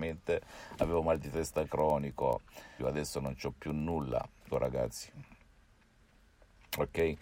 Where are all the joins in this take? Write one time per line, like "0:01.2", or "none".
0:02.8
0:04.5